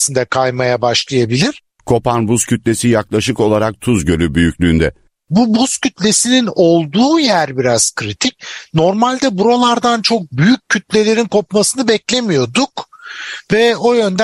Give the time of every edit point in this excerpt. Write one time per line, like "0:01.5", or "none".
none